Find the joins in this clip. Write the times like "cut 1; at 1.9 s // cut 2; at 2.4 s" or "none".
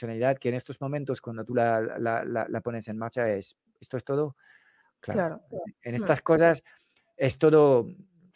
none

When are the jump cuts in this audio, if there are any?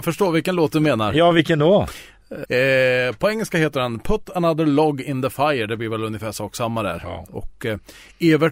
cut 1; at 2.4 s

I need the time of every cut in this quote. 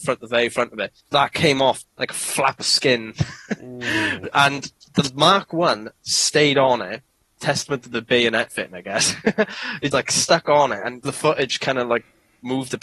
cut 1; at 1.0 s // cut 2; at 9.9 s // cut 3; at 11.0 s

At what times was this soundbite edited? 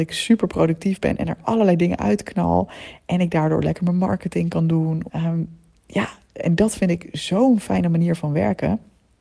cut 1; at 5.1 s

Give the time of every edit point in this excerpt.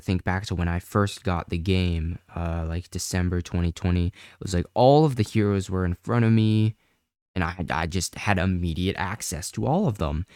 none

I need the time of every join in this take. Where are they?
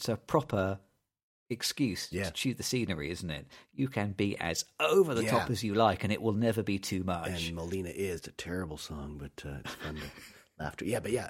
cut 1; at 8.2 s

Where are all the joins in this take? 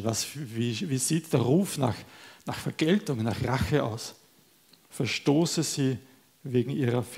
cut 1; at 4.9 s

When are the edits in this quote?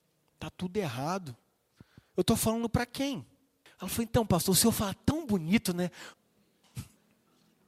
cut 1; at 3.7 s // cut 2; at 6.1 s

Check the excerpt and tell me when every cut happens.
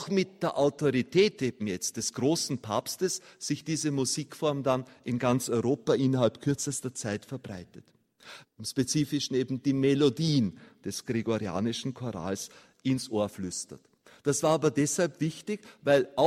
cut 1; at 8.4 s

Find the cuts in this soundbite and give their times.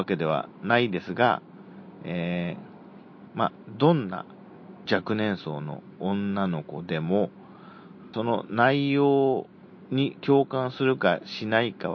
cut 1; at 4.9 s // cut 2; at 8.1 s

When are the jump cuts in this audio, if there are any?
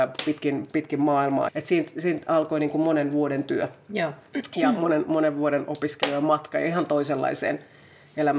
cut 1; at 1.5 s

